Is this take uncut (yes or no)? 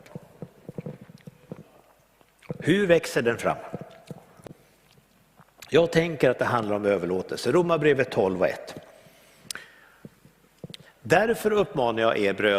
no